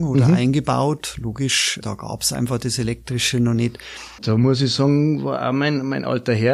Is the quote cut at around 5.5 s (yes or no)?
no